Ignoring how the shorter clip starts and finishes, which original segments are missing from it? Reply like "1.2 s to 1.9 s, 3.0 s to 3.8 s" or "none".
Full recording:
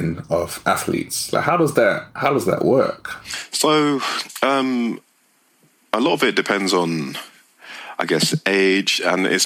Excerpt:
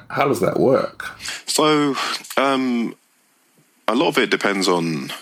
none